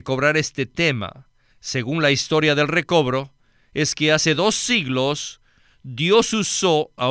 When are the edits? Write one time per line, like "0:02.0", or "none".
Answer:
0:01.5